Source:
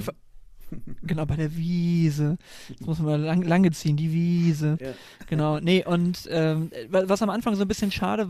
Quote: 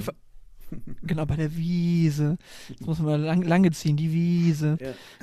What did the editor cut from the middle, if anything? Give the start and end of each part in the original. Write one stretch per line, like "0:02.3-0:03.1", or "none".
none